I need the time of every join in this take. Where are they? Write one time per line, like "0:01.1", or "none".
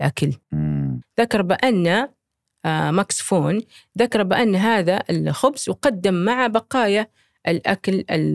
0:01.0